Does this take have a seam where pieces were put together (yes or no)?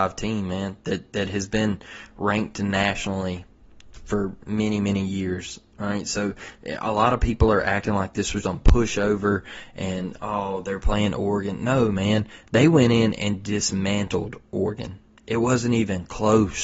yes